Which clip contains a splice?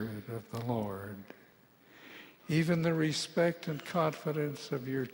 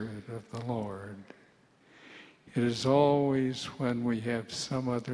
first; 1 cut; at 2.4 s

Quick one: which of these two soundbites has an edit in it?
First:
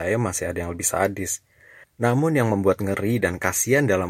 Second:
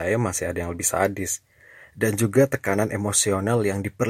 first; 1 cut; at 1.8 s

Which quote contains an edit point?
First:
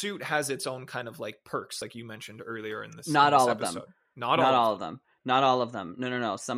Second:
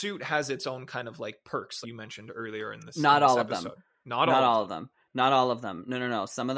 second; 1 cut; at 1.8 s

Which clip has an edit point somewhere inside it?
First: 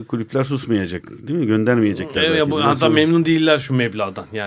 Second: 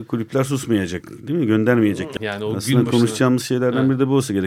second; 1 cut; at 2.2 s

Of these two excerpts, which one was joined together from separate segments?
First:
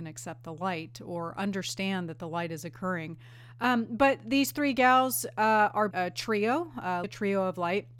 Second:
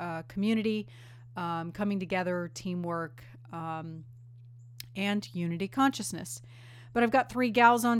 first; 2 cuts; at 5.9 s, 7.0 s

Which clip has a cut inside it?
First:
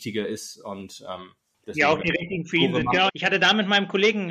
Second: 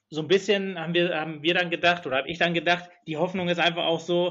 first; 2 cuts; at 1.5 s, 3.1 s

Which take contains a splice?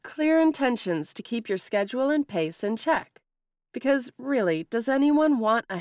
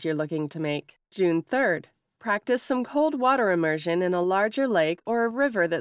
second; 1 cut; at 1.0 s

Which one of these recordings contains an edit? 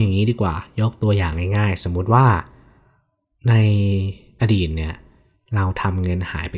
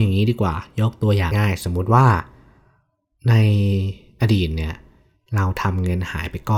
second; 1 cut; at 1.3 s

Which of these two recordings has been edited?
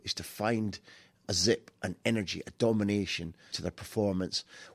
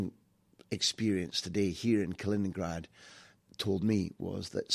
first; 1 cut; at 3.5 s

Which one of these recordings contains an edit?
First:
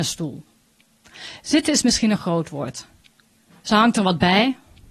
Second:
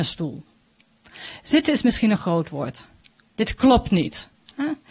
second; 1 cut; at 3.3 s

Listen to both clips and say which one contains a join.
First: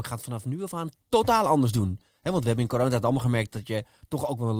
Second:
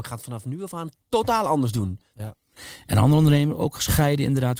second; 1 cut; at 2.1 s

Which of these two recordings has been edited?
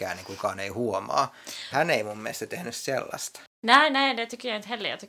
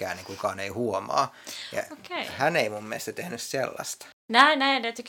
first; 1 cut; at 1.7 s

